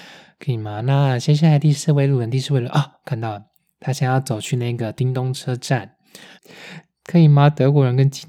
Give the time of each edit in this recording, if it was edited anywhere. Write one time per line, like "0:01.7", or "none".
0:06.4